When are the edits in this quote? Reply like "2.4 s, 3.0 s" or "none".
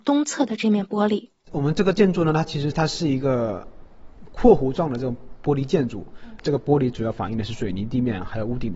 6.4 s